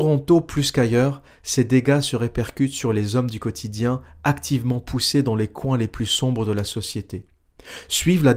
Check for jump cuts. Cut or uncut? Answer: uncut